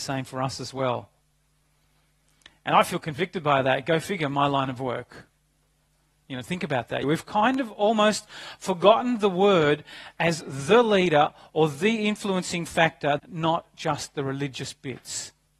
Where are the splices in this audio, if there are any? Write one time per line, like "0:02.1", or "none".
0:07.0
0:13.2